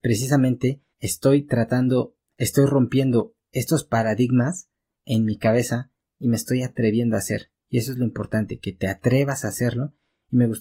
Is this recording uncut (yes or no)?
no